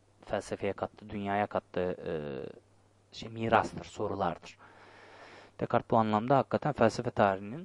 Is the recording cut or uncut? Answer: uncut